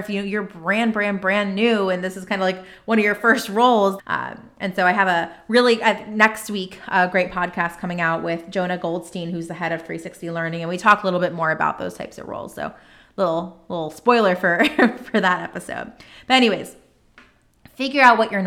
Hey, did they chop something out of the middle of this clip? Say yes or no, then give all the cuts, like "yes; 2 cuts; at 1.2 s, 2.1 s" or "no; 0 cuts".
yes; 1 cut; at 4.0 s